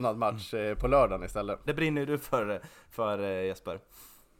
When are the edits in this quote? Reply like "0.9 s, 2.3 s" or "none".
1.7 s